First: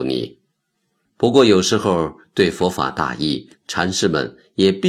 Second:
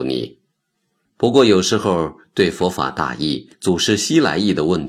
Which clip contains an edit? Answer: first; 1 cut; at 3.6 s

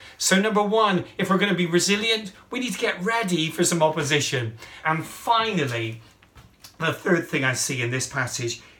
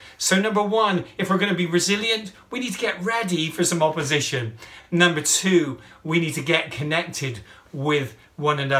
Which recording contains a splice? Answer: first; 1 cut; at 4.8 s

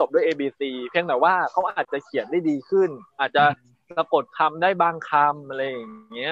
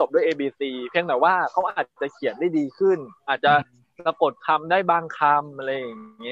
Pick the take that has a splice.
first; 1 cut; at 1.8 s

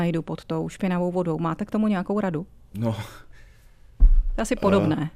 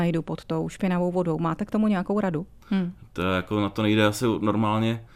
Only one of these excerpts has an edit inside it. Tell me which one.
second; 1 cut; at 2.6 s

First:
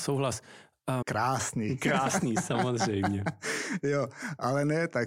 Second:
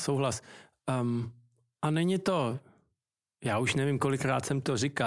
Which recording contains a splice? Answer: first; 1 cut; at 1.0 s

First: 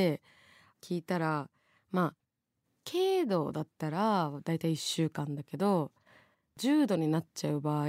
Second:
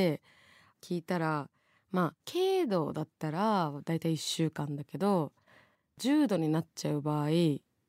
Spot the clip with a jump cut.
second; 1 cut; at 2.2 s

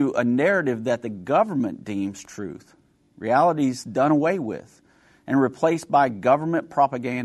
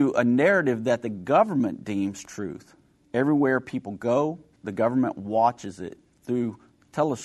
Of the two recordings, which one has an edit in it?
second; 2 cuts; at 3.0 s, 4.6 s

